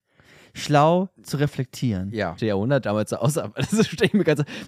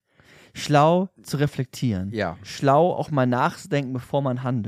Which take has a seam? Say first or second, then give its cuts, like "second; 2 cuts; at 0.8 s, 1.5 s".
first; 1 cut; at 2.4 s